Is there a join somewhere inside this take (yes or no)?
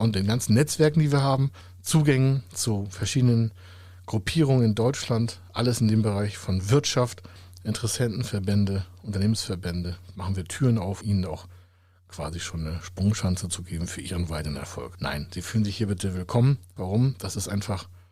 yes